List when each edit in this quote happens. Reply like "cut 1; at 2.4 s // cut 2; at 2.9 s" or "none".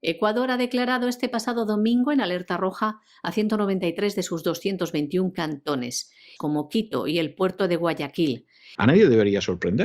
cut 1; at 6.4 s // cut 2; at 8.8 s